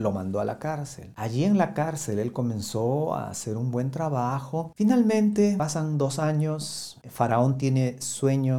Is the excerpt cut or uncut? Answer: cut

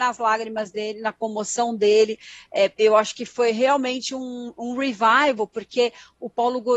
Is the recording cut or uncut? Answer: uncut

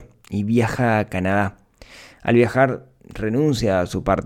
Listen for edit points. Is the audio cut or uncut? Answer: uncut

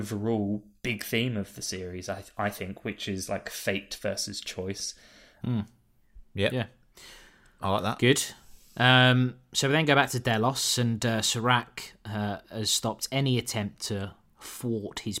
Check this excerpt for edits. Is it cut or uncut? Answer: cut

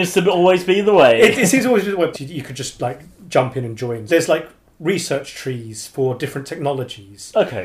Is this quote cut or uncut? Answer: cut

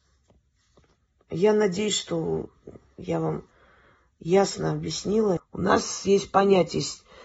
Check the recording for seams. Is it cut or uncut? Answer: cut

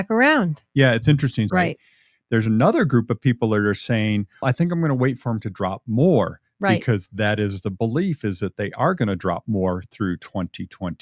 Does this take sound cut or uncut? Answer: cut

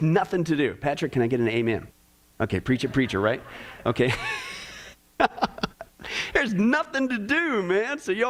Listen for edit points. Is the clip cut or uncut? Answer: uncut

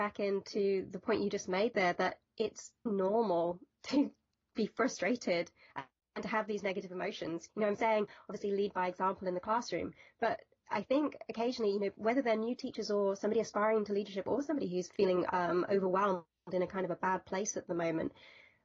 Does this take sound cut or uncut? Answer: cut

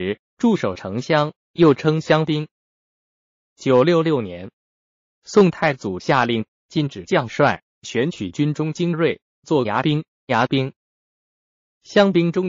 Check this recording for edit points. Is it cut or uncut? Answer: cut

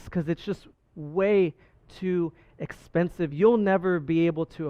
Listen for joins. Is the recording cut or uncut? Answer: uncut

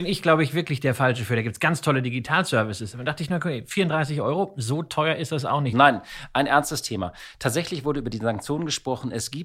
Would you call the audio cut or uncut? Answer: cut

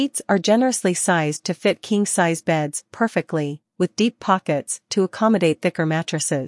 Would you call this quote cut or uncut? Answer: uncut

